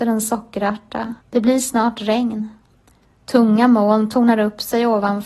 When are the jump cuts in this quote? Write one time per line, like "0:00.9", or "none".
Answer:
0:01.2